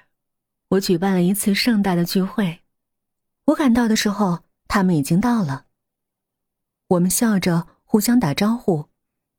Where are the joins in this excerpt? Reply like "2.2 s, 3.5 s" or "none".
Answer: 3.4 s